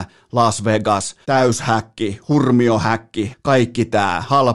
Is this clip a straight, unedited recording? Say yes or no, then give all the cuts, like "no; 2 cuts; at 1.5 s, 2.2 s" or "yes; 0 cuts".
no; 2 cuts; at 1.2 s, 3.3 s